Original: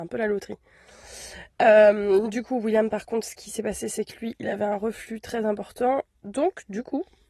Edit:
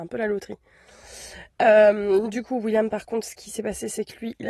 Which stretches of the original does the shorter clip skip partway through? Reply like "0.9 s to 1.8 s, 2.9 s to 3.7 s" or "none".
none